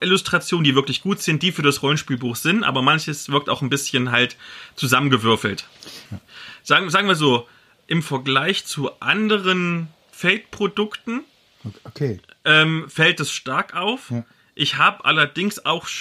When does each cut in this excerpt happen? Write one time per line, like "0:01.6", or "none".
0:06.1